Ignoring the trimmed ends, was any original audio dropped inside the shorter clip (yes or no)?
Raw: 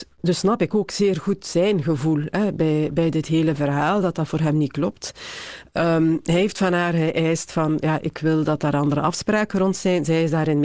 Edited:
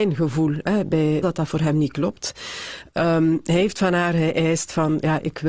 yes